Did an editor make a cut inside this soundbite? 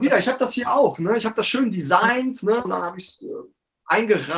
yes; 1 cut; at 2.6 s

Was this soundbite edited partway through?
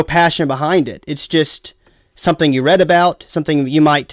no; 0 cuts

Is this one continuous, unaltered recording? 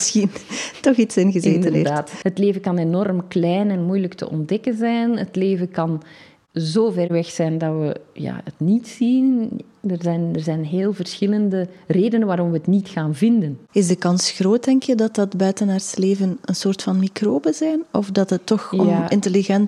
no; 1 cut; at 2.2 s

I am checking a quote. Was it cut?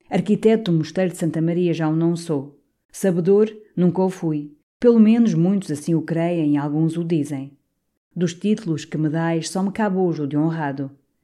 yes; 1 cut; at 2.8 s

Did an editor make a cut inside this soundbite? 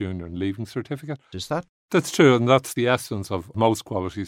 yes; 1 cut; at 1.3 s

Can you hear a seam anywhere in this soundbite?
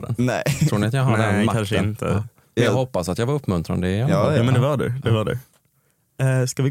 no; 0 cuts

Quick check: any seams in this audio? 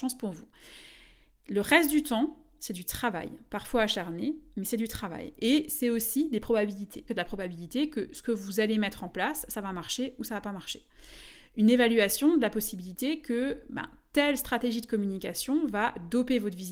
yes; 1 cut; at 7.1 s

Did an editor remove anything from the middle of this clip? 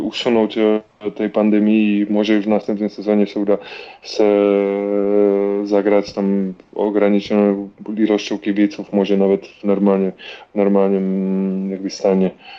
no; 0 cuts

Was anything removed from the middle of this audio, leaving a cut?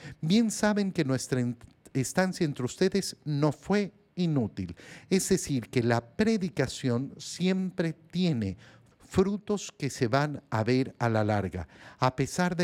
yes; 1 cut; at 8.9 s

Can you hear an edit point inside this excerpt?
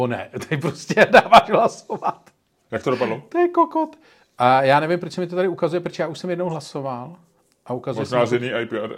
no; 0 cuts

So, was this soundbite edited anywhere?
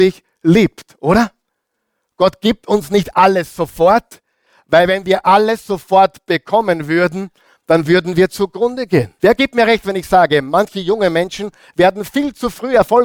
yes; 1 cut; at 9.2 s

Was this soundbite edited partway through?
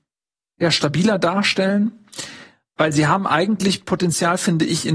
no; 0 cuts

